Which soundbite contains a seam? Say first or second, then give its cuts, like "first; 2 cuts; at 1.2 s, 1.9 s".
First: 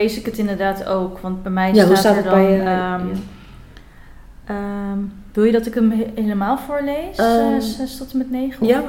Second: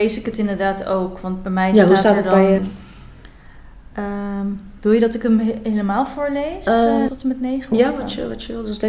second; 2 cuts; at 2.6 s, 7.1 s